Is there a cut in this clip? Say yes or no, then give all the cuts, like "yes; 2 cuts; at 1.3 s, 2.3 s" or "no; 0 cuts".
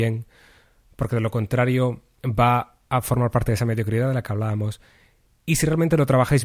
no; 0 cuts